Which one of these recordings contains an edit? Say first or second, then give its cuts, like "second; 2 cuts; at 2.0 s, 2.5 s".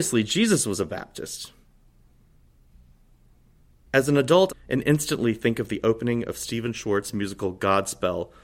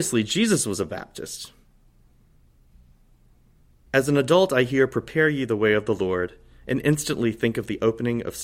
first; 1 cut; at 4.5 s